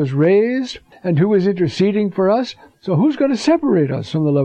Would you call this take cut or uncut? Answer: cut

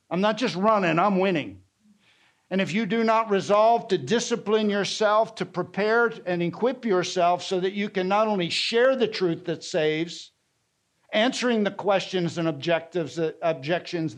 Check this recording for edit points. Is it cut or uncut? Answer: uncut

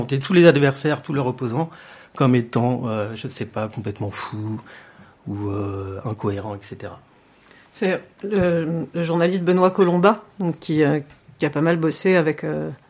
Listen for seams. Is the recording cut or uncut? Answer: uncut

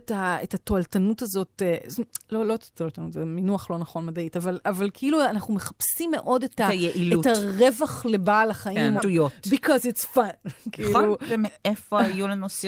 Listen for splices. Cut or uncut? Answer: cut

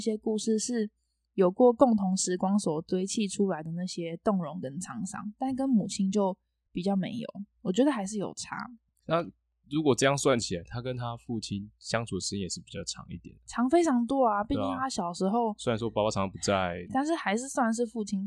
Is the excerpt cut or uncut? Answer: cut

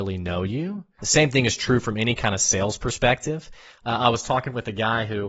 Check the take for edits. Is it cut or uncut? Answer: cut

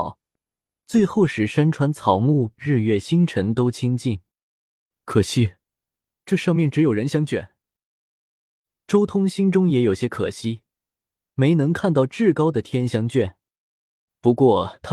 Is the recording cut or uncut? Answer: uncut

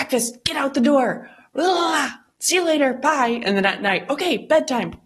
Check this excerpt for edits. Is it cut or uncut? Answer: uncut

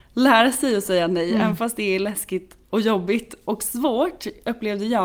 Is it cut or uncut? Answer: uncut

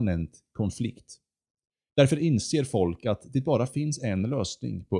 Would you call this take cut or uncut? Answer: cut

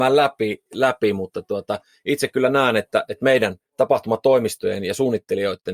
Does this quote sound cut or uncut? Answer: uncut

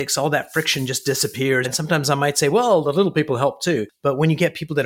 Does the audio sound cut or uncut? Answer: cut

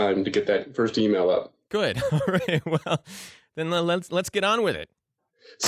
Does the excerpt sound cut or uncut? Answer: uncut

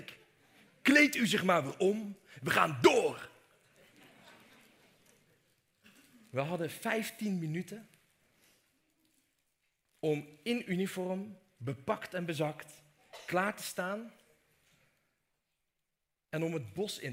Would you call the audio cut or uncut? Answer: uncut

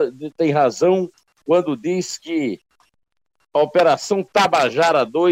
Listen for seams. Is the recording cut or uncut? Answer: uncut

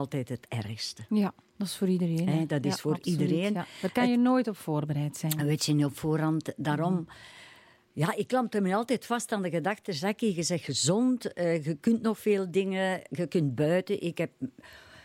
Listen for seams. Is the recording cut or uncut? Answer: uncut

